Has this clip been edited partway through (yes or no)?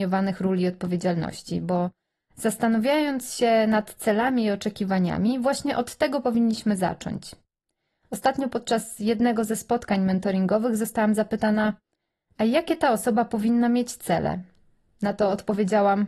no